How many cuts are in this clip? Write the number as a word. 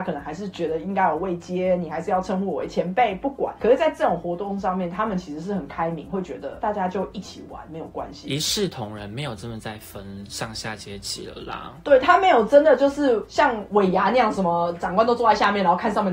zero